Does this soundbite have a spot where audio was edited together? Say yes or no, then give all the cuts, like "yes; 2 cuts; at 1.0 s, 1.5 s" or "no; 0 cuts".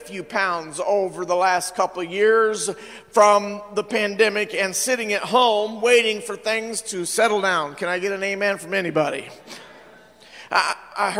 no; 0 cuts